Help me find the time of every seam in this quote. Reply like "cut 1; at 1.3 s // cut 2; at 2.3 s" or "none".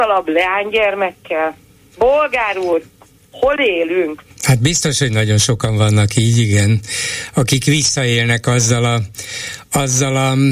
cut 1; at 4.3 s